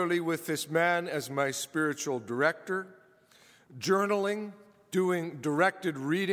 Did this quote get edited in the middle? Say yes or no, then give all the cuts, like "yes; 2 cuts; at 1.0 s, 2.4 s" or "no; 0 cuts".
no; 0 cuts